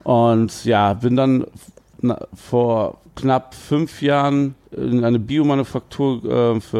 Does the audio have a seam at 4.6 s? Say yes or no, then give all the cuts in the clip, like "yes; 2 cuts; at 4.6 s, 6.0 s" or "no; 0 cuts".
yes; 1 cut; at 4.6 s